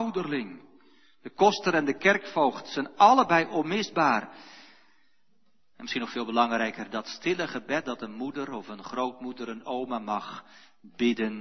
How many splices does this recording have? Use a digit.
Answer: 0